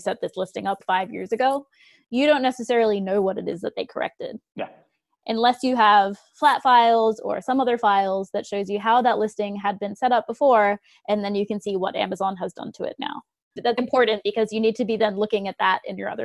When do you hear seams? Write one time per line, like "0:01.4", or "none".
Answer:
0:13.8

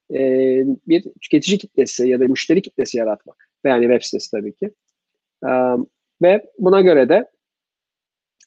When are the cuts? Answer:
0:03.6

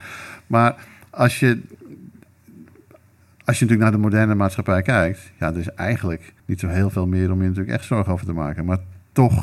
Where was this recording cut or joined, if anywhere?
0:06.4

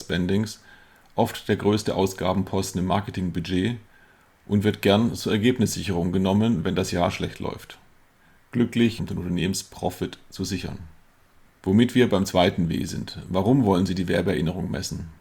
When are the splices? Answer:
0:09.0
0:11.4

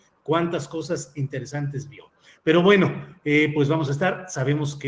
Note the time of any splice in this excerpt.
0:02.4

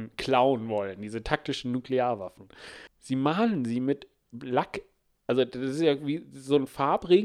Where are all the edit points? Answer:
0:02.9

